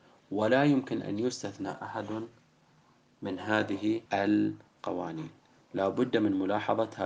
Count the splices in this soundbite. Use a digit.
1